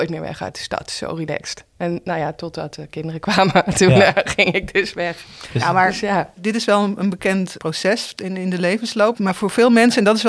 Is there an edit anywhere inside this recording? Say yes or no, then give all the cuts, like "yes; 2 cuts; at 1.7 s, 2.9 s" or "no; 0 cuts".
no; 0 cuts